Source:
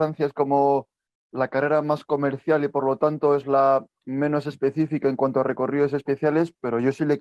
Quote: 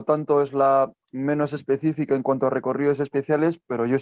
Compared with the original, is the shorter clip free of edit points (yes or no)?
yes